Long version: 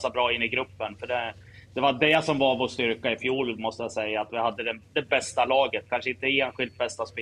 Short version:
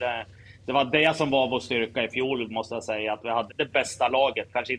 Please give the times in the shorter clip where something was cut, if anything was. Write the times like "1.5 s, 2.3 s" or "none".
3.5 s